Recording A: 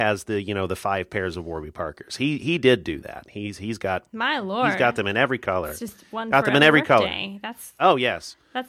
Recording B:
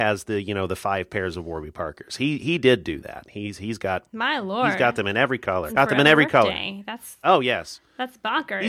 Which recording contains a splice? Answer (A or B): B